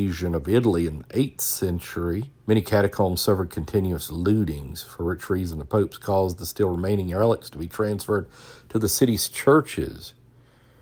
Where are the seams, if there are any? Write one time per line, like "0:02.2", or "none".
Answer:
0:02.4